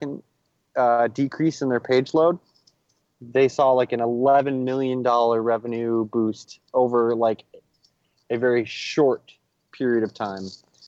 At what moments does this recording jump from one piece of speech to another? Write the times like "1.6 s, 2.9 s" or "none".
none